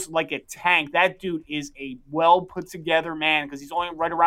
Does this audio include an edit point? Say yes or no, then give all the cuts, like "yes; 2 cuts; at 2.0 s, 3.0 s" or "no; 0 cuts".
no; 0 cuts